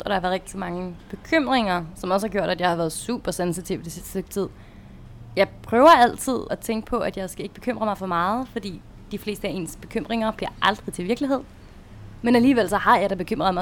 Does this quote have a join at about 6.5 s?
yes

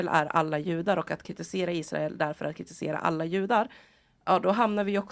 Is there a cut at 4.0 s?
no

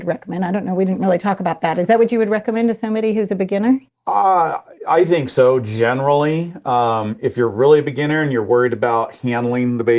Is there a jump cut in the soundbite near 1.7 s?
no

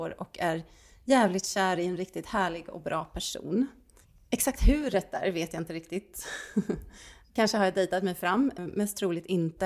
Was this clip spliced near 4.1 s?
no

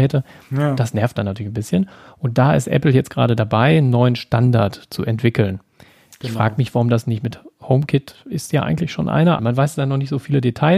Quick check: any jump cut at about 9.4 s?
yes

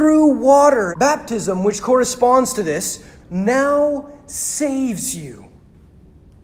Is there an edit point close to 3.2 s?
yes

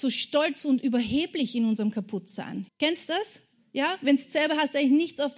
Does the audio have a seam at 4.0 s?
no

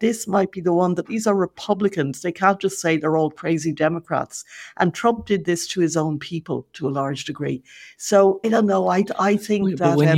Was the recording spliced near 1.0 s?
yes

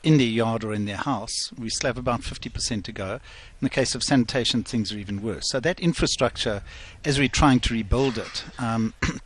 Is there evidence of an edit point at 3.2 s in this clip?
no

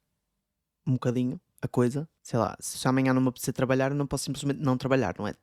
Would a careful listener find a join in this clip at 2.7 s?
yes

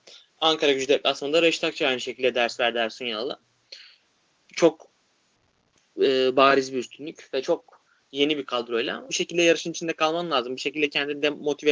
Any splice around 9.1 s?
yes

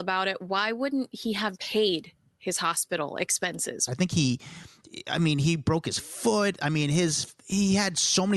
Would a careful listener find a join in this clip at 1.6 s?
yes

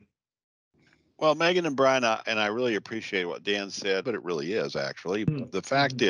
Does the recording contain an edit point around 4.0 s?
yes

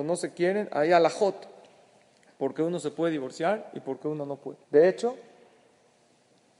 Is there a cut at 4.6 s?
yes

